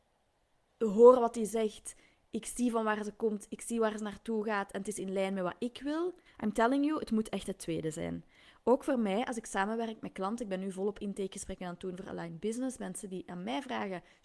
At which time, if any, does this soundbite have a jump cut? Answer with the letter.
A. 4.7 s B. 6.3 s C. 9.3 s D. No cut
B